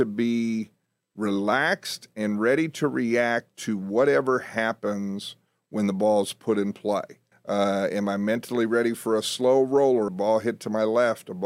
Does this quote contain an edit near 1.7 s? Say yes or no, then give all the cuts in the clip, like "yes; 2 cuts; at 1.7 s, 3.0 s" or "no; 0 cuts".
no; 2 cuts; at 7.3 s, 10.1 s